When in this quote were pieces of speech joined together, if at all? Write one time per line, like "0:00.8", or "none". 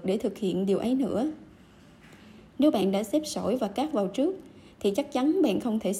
0:02.5